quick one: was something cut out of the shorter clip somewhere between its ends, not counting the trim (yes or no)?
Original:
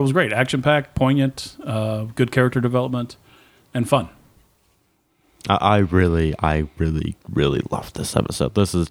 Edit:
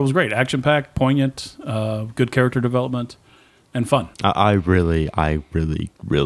yes